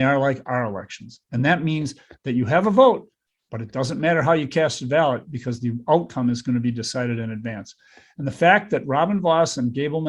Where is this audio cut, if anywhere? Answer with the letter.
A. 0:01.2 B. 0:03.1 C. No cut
C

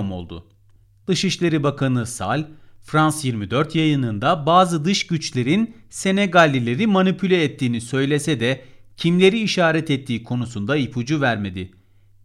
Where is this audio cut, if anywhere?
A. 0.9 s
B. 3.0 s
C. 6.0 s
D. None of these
D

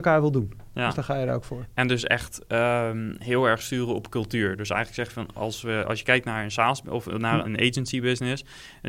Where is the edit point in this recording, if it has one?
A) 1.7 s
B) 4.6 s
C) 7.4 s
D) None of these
C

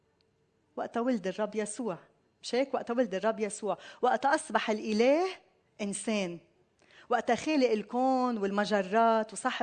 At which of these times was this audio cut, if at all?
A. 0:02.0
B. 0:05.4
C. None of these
C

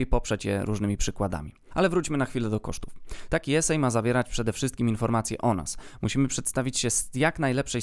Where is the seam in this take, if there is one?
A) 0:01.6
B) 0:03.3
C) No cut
B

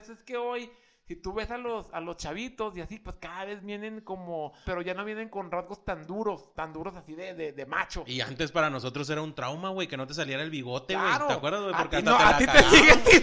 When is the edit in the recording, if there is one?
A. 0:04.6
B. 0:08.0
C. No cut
A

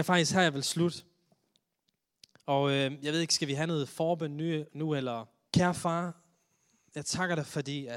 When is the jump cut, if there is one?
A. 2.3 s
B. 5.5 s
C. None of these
B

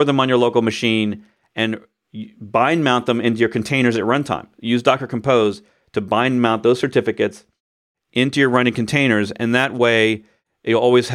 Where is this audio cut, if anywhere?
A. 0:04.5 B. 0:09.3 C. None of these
C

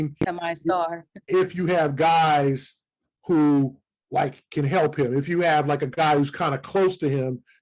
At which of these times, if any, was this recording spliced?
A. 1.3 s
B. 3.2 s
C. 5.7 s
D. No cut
A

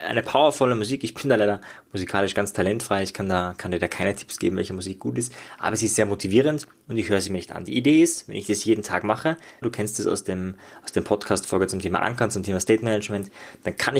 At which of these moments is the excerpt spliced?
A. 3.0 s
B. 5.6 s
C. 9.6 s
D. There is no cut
C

